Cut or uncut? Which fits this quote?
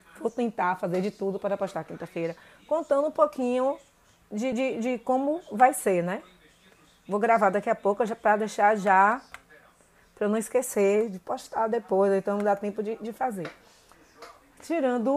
uncut